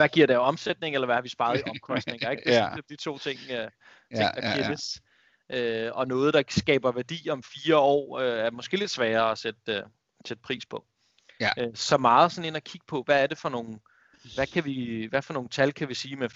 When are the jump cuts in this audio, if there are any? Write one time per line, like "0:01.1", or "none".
none